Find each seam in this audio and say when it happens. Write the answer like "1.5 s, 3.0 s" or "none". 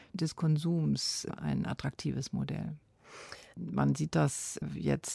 1.4 s, 3.5 s